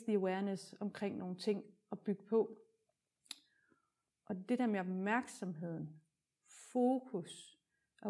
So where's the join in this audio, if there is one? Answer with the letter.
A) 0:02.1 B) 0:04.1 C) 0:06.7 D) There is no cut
B